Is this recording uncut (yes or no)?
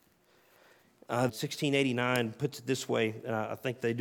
no